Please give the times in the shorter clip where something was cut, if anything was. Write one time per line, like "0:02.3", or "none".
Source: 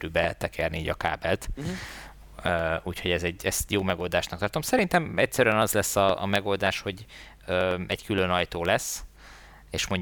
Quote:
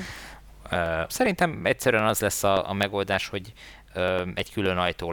0:01.1